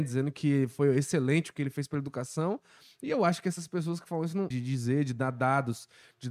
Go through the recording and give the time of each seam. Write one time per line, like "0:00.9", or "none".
0:04.5